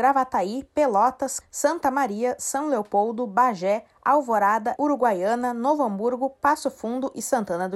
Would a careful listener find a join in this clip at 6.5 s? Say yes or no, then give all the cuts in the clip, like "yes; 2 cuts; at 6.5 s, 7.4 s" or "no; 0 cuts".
no; 2 cuts; at 1.4 s, 4.8 s